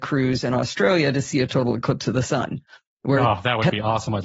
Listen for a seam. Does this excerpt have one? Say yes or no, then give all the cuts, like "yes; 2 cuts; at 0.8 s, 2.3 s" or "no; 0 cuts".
no; 0 cuts